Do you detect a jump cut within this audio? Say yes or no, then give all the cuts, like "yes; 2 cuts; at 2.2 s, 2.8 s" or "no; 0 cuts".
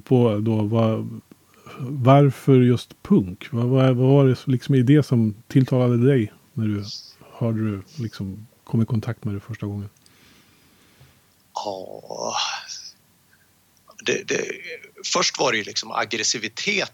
no; 0 cuts